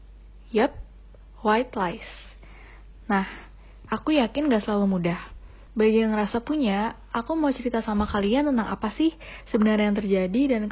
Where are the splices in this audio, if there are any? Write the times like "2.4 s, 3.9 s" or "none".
3.9 s, 5.7 s